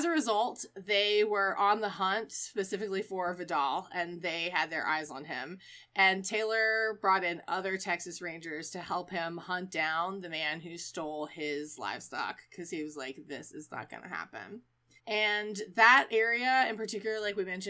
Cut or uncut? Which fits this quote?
cut